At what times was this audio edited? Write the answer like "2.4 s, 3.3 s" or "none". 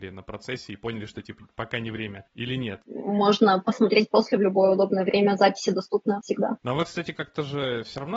2.8 s